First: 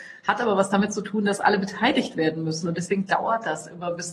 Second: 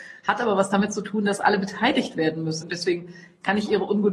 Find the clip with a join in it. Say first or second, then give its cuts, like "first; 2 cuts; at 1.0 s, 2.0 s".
second; 1 cut; at 2.6 s